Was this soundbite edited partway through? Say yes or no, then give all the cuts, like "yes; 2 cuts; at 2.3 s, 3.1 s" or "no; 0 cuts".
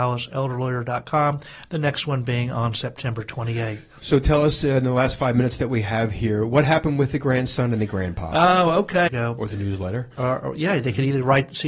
yes; 1 cut; at 9.1 s